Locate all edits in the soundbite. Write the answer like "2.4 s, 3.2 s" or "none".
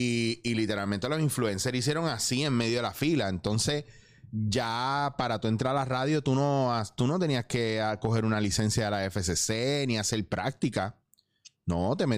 none